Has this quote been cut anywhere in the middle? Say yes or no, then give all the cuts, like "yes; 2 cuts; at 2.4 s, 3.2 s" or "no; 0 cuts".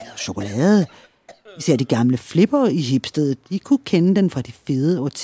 no; 0 cuts